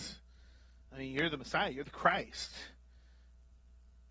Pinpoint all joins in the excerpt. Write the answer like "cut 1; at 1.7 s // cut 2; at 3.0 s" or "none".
none